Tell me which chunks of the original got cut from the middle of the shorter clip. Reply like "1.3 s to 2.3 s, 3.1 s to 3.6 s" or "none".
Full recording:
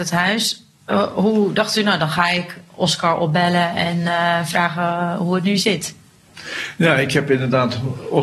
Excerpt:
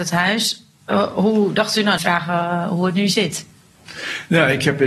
2.0 s to 4.5 s